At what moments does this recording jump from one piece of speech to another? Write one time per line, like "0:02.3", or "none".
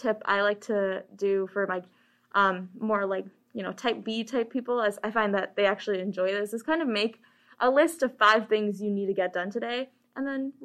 none